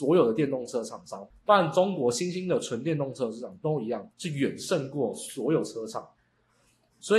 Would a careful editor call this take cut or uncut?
cut